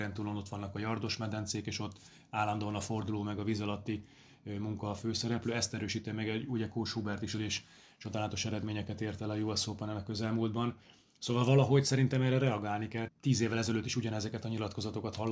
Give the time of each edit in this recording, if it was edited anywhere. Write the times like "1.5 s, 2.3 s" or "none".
7.3 s, 13.1 s